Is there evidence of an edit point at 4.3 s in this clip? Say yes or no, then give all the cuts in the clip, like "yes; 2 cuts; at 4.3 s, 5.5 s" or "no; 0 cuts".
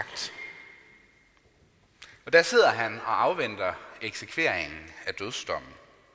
no; 1 cut; at 2.2 s